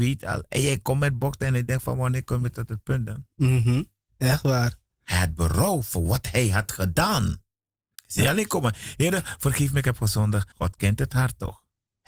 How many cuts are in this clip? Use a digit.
3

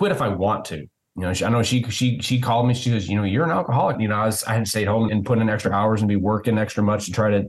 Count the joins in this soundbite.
2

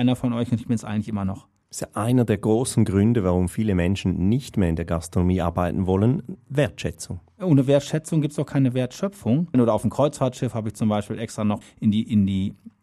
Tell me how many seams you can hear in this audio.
2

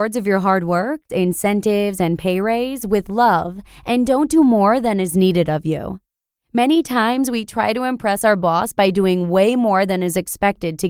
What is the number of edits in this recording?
1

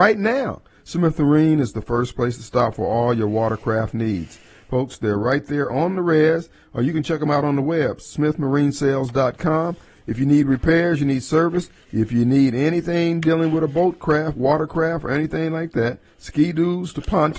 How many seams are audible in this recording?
0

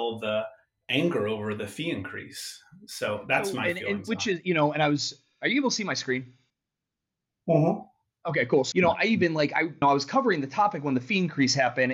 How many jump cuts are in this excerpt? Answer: 2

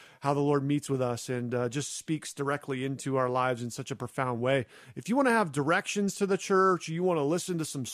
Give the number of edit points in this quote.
0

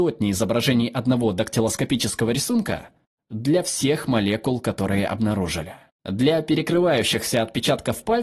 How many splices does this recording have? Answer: 1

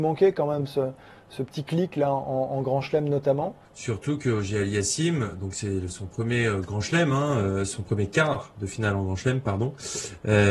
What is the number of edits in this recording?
1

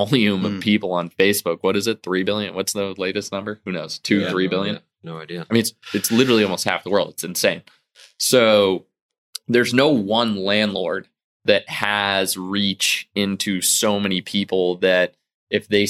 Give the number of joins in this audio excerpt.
0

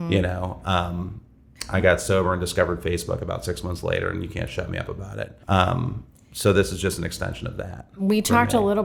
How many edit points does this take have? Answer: 1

